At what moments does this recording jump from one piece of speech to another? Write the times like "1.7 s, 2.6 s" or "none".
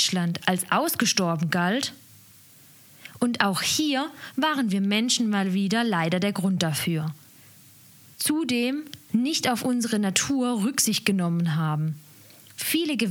8.1 s